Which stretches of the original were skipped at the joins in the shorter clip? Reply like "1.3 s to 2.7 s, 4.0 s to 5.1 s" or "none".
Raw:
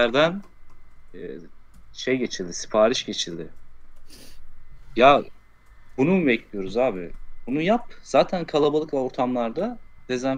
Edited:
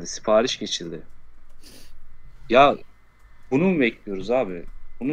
none